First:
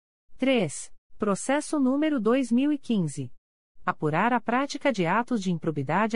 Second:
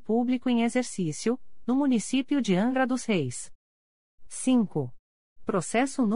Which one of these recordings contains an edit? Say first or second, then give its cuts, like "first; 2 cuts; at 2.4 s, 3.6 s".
first; 2 cuts; at 1.1 s, 3.8 s